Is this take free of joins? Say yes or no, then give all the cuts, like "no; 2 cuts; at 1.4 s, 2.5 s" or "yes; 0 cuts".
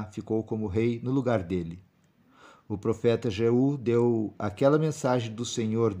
yes; 0 cuts